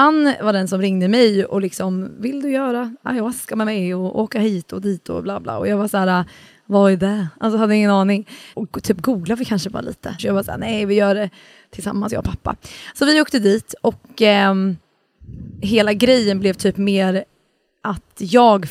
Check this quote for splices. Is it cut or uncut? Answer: cut